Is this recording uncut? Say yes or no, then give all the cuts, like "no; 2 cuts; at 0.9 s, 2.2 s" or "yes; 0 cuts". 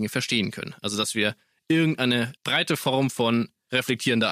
no; 1 cut; at 2.4 s